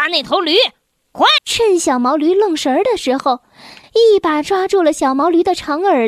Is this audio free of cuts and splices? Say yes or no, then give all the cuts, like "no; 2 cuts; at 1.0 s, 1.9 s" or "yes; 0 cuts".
no; 2 cuts; at 1.4 s, 3.8 s